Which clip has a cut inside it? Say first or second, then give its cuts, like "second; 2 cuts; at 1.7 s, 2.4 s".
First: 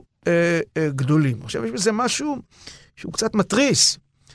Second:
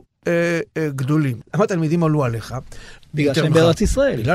second; 2 cuts; at 1.4 s, 3.0 s